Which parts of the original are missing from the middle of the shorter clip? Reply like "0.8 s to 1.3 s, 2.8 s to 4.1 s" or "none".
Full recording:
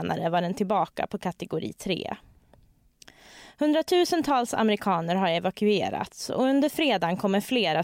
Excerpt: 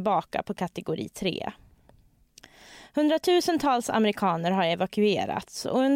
none